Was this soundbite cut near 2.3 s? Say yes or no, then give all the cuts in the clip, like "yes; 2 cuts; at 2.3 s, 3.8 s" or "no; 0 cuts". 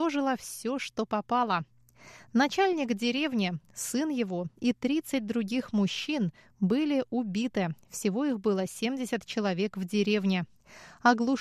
no; 0 cuts